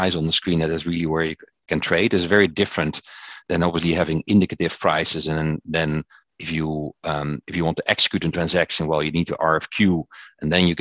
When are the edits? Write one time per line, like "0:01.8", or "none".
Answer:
none